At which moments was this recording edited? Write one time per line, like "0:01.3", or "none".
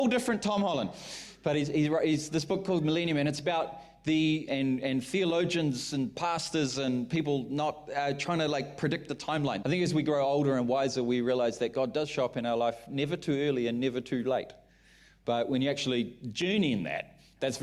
0:04.5
0:09.6